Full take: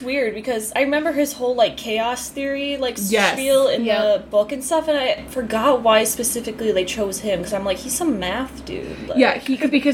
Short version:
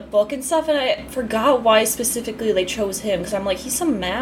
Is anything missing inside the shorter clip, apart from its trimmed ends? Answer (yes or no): no